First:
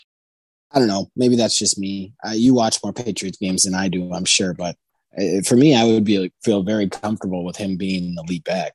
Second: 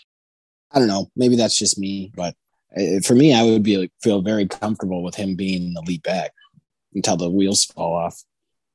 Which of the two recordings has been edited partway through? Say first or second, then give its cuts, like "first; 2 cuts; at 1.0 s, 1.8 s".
second; 1 cut; at 2.1 s